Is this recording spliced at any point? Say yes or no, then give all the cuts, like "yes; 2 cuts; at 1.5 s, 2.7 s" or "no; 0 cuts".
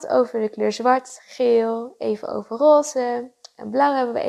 no; 0 cuts